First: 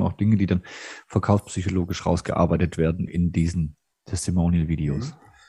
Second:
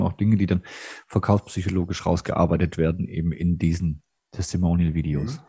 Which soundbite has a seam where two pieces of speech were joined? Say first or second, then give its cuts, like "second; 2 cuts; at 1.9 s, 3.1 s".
first; 1 cut; at 3.1 s